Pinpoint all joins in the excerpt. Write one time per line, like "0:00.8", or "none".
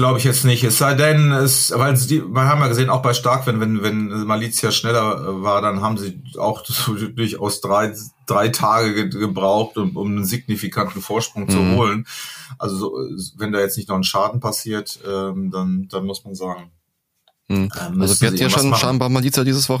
none